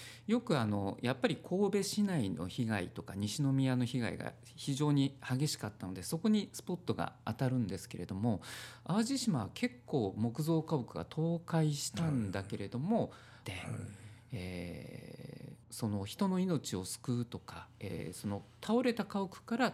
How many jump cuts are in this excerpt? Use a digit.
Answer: 2